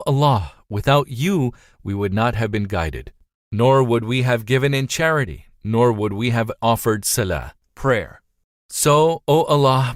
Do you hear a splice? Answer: no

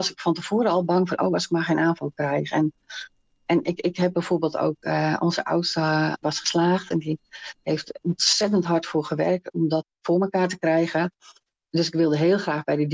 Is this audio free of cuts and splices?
yes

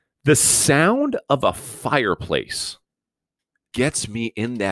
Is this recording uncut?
no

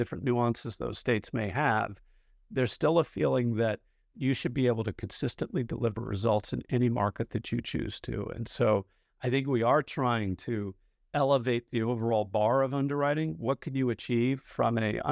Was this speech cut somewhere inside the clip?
no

